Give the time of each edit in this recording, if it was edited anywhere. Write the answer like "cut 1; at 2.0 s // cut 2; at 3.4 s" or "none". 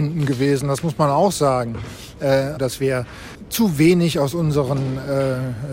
cut 1; at 2.6 s